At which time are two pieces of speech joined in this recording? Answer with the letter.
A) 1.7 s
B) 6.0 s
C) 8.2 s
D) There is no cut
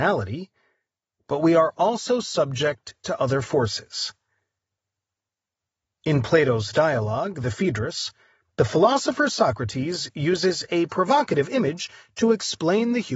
D